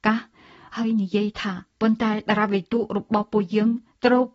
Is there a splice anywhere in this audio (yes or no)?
yes